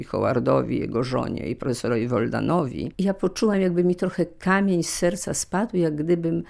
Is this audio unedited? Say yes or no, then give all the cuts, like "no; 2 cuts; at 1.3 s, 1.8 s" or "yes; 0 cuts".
yes; 0 cuts